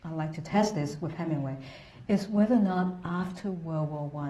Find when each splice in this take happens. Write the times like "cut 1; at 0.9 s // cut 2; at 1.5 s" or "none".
none